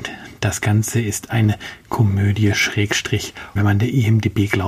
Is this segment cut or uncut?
cut